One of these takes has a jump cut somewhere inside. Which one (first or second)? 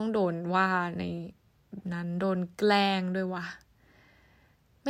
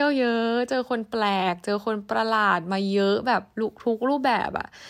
first